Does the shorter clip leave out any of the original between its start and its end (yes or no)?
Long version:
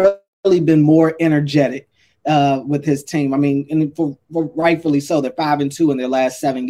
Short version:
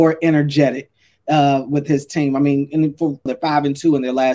yes